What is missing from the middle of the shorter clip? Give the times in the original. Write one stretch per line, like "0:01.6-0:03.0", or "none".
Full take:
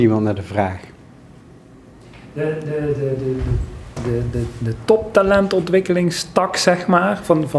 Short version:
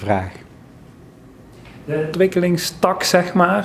0:02.6-0:05.7